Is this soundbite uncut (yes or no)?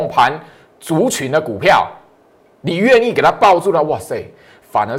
yes